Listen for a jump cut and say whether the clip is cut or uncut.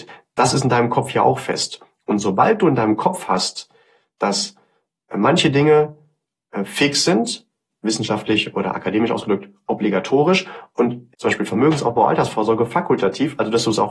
cut